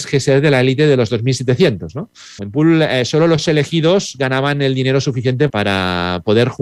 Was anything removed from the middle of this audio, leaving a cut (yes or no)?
yes